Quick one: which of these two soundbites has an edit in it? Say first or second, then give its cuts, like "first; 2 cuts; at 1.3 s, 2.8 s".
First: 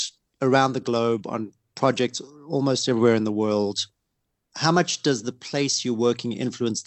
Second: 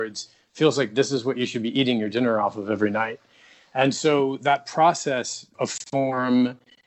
second; 1 cut; at 5.5 s